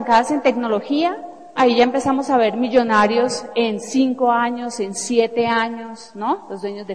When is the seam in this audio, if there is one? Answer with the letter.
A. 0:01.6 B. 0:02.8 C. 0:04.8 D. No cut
A